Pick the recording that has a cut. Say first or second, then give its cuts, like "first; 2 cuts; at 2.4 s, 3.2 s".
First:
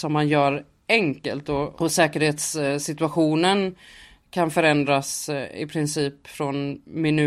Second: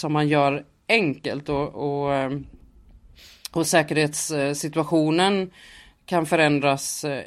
first; 1 cut; at 1.7 s